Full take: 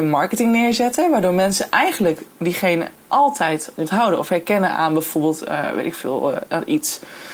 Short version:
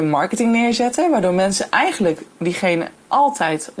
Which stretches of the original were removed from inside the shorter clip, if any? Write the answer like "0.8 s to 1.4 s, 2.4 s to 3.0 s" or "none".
none